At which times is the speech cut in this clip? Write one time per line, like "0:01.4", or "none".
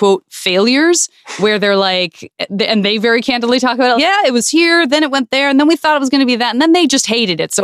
0:03.9